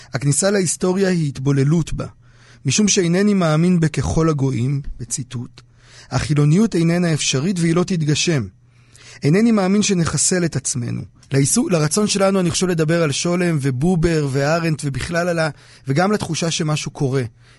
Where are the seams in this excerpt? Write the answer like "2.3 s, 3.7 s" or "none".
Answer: 11.2 s